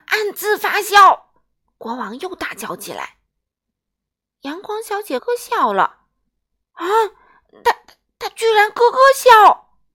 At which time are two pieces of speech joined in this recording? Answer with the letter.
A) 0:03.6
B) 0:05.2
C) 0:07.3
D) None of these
B